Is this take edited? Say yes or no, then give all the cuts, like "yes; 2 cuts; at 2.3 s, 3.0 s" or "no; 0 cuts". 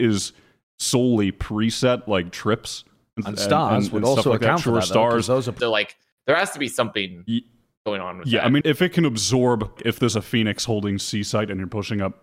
yes; 3 cuts; at 5.6 s, 8.6 s, 9.8 s